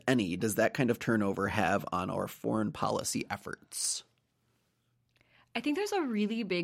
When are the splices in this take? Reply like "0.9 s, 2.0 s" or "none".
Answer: none